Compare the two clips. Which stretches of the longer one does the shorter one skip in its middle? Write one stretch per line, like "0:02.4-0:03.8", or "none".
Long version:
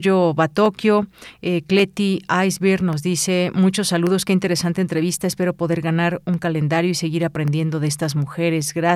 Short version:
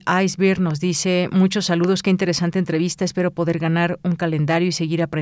none